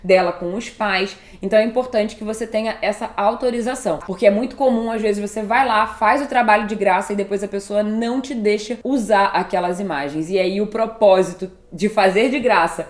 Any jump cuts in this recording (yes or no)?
yes